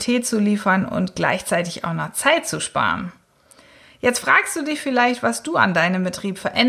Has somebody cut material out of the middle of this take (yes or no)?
no